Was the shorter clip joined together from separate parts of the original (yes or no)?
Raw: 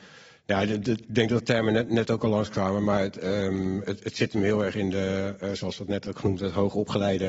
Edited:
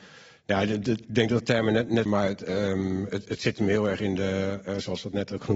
yes